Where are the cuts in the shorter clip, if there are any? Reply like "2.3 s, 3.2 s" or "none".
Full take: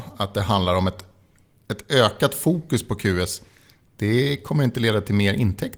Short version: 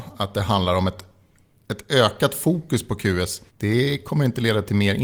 3.5 s

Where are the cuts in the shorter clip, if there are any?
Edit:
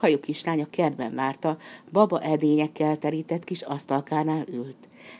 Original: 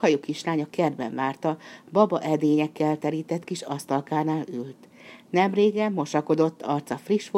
none

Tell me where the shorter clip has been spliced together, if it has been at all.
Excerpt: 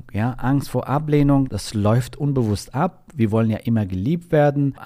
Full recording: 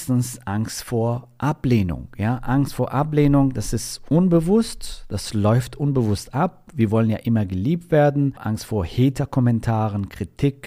1.5 s

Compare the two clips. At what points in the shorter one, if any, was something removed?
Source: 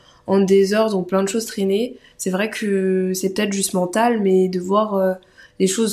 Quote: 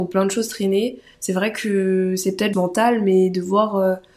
2.5 s

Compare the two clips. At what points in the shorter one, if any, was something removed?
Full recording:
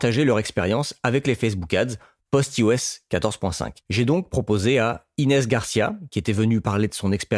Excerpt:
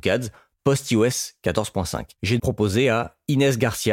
2.4 s

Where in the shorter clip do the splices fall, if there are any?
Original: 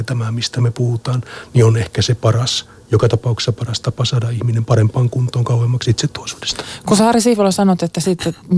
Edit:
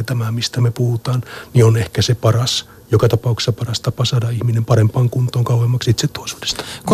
none

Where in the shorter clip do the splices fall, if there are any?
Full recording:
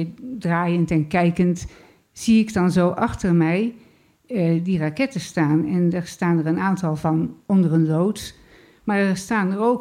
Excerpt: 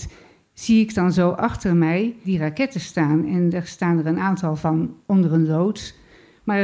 2.2 s

